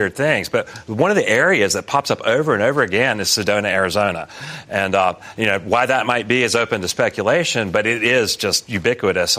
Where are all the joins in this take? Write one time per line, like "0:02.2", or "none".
none